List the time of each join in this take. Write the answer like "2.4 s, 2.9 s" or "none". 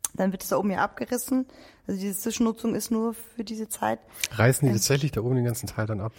none

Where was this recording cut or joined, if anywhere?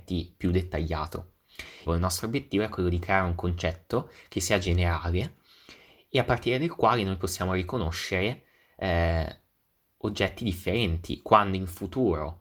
1.9 s

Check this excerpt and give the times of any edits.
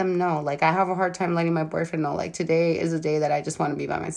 none

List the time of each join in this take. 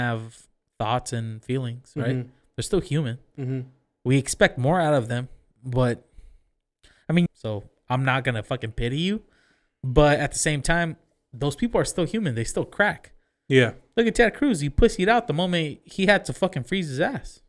7.3 s

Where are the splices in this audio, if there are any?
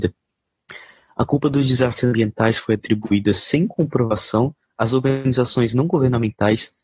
none

